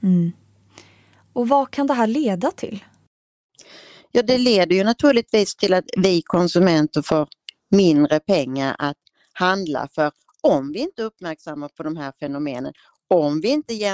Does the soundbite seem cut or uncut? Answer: uncut